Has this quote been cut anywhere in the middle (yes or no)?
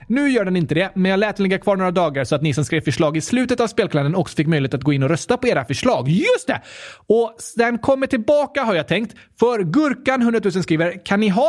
no